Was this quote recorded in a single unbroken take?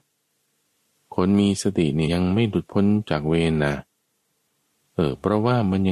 no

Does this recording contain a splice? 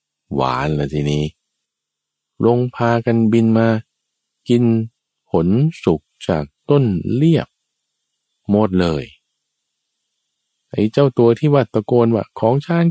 no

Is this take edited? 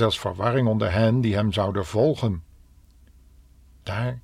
no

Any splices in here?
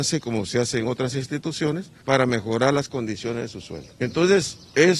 yes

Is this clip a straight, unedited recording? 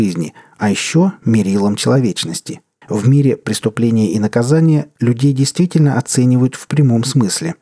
no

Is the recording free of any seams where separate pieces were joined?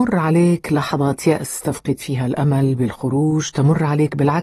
yes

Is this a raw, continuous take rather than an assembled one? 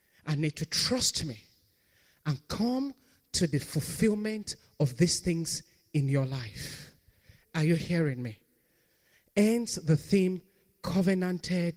yes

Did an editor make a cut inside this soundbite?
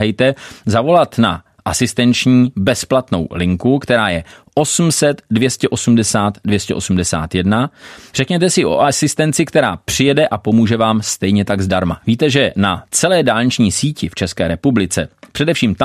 yes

